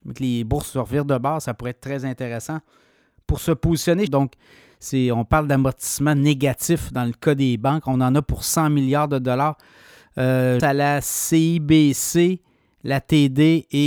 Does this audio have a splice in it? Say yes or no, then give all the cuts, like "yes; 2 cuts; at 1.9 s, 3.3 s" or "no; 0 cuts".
yes; 2 cuts; at 4.1 s, 10.6 s